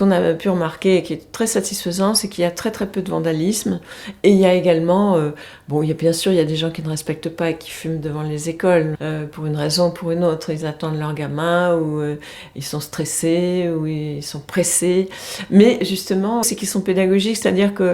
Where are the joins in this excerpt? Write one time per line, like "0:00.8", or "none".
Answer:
0:08.9
0:16.4